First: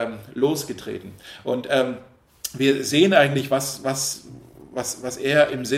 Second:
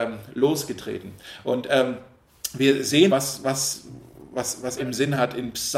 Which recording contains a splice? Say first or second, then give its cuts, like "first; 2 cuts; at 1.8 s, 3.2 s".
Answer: second; 2 cuts; at 3.1 s, 4.8 s